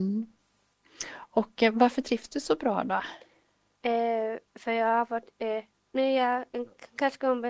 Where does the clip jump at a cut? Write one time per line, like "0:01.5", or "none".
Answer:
none